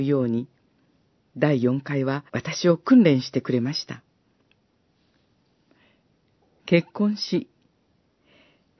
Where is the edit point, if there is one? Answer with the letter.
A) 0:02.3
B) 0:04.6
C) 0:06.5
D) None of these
A